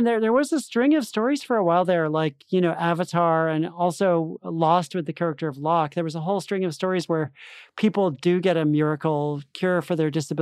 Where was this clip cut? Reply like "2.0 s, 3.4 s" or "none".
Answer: none